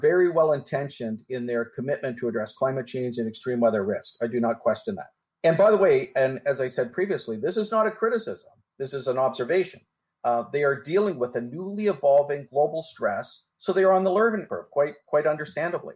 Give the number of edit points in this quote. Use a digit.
1